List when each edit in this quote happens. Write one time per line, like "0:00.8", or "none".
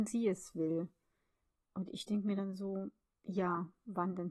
none

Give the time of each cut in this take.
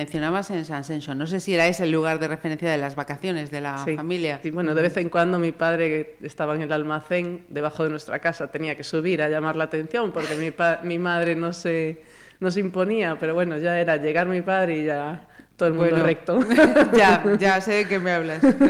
0:04.4

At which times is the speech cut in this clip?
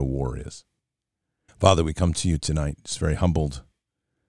0:01.5

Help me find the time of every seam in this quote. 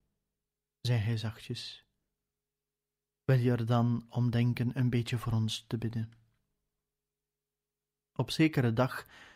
0:08.0

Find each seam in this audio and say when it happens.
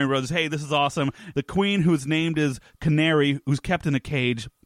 0:01.3

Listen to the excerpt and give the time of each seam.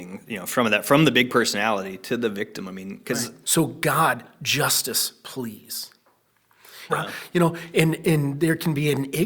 0:03.4
0:06.9

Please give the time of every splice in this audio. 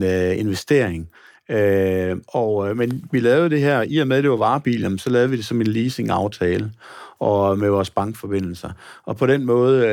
none

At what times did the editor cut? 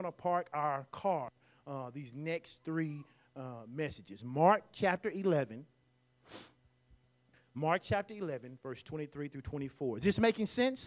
none

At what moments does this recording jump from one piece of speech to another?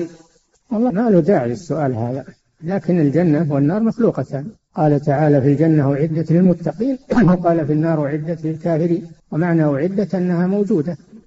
0:00.9
0:09.2

